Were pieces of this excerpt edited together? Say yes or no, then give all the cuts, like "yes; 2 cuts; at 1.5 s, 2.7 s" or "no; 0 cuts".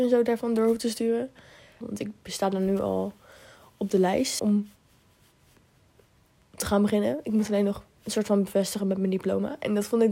yes; 2 cuts; at 1.8 s, 4.4 s